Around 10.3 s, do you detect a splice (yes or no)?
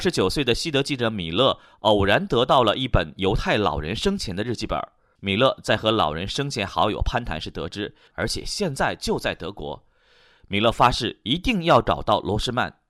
no